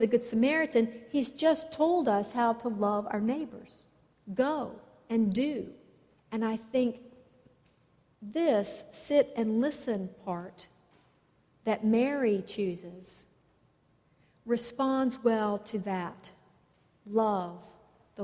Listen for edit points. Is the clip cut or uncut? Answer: cut